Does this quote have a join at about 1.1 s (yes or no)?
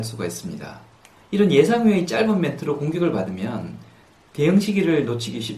yes